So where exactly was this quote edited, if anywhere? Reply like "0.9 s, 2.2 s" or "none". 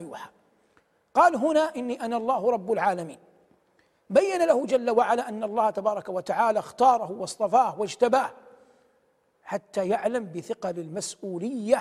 none